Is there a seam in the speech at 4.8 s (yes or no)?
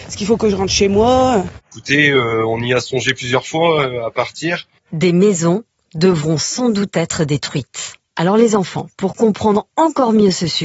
yes